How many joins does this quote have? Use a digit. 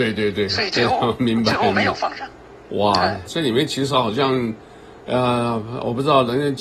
1